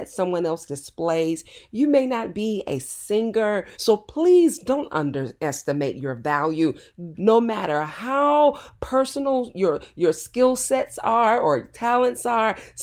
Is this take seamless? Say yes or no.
no